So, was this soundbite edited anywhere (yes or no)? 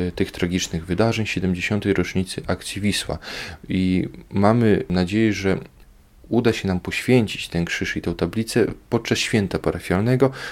no